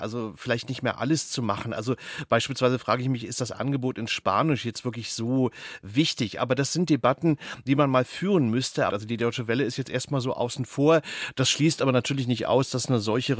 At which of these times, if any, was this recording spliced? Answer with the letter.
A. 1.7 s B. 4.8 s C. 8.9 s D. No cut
C